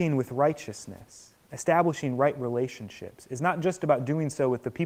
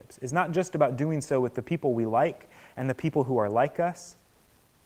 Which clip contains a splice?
first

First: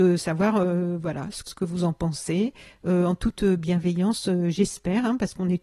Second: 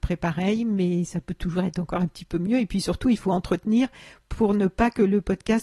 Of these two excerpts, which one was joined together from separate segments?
first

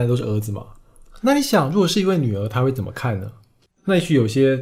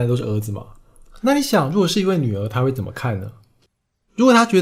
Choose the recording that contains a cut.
first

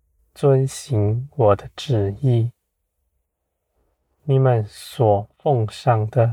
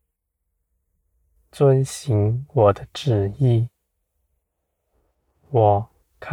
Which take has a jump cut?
first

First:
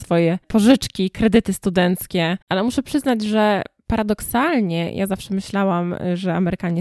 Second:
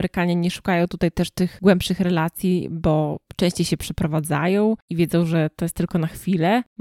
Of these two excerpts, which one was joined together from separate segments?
first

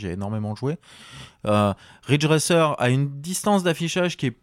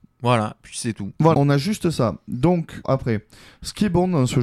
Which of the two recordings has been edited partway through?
second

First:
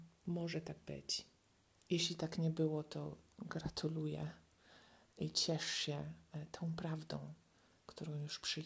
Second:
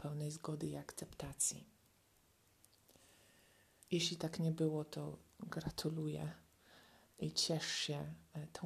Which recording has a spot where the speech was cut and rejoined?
second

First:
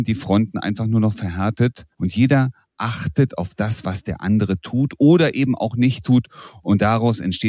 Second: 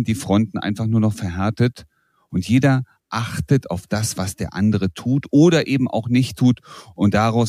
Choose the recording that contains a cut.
first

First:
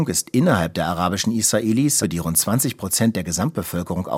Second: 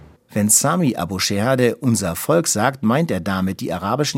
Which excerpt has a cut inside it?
first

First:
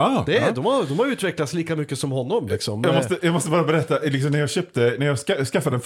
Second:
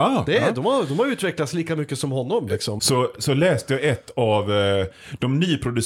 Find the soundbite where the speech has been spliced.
second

